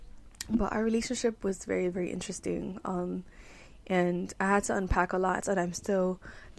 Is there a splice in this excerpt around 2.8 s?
no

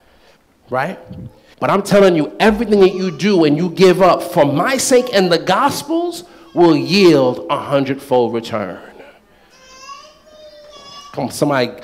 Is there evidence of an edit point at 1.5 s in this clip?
yes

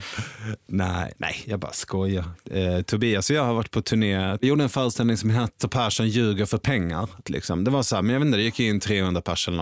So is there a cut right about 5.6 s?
yes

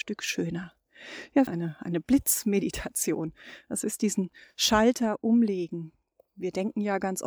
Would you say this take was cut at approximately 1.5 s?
yes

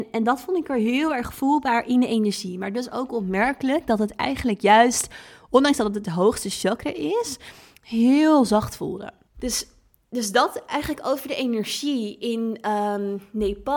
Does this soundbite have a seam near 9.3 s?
yes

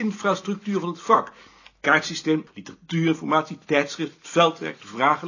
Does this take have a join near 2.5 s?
yes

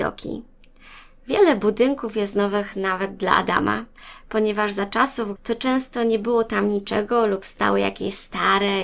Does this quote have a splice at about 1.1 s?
no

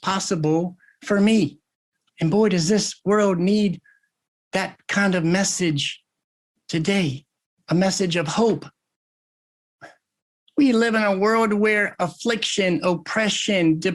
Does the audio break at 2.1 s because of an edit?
yes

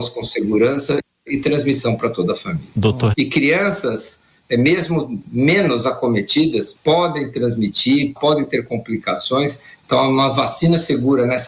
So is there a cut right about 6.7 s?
yes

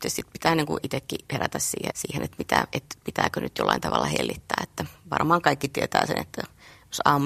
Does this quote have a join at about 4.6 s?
no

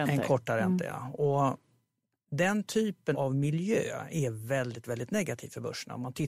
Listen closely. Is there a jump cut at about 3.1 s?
yes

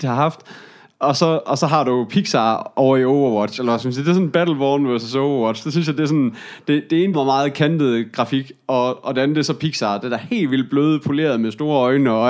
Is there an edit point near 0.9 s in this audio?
no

